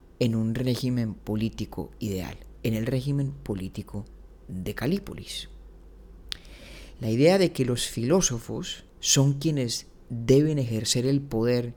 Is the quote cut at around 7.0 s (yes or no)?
yes